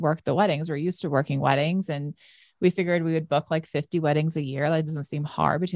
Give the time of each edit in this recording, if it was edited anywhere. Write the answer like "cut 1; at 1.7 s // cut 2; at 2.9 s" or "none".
none